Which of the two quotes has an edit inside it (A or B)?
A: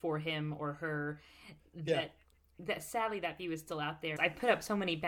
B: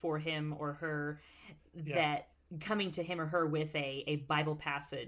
A